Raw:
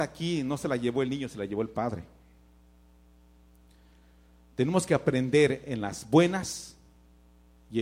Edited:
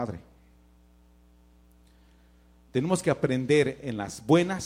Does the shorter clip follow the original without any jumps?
yes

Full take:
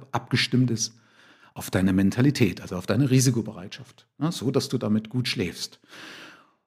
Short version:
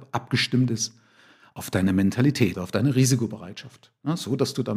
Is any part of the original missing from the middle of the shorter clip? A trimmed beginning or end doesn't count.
yes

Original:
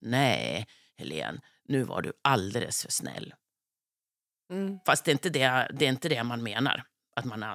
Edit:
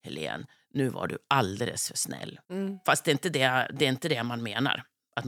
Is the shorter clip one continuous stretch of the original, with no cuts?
no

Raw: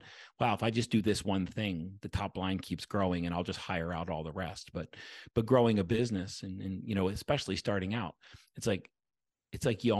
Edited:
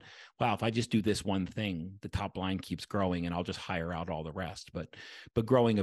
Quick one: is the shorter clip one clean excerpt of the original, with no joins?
yes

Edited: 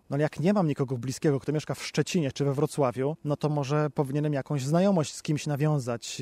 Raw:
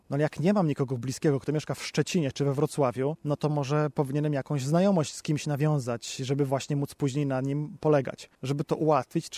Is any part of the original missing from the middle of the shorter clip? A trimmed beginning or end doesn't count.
no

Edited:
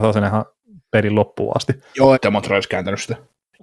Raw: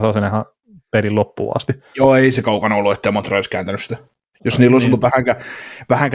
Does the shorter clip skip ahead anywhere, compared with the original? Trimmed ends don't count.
yes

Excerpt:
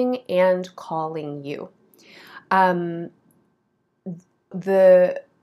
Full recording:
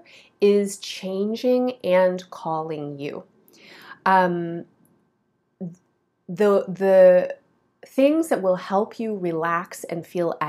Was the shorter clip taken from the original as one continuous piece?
no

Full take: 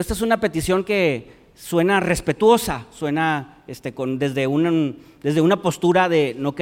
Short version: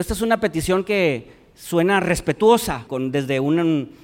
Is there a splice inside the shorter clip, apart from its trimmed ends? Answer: yes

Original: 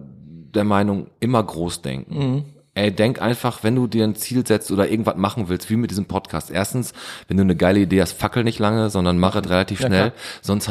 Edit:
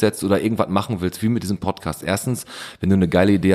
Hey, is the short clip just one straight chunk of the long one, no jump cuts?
yes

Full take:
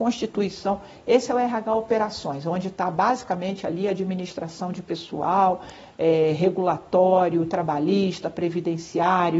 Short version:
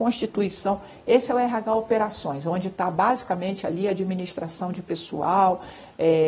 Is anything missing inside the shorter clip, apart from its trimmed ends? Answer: no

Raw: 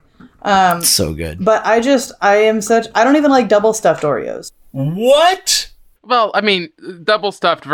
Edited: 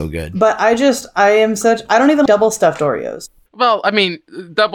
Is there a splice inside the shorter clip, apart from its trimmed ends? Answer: yes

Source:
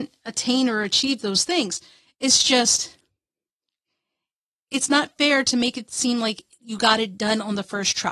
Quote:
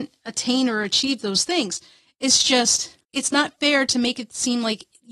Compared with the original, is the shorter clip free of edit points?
no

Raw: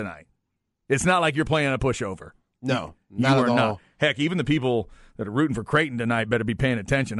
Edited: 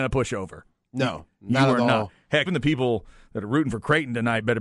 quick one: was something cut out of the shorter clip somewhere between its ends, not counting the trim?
yes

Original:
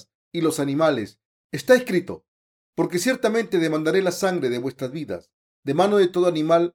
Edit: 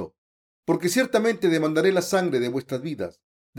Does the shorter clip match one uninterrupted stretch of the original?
yes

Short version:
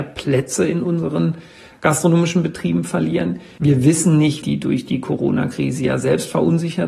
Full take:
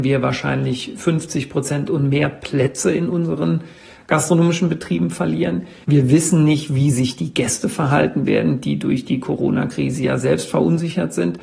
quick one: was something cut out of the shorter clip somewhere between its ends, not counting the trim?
yes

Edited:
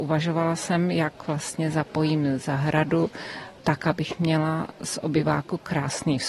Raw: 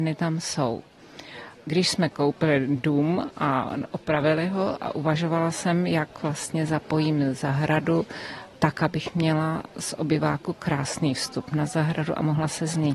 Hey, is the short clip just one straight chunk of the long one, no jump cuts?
yes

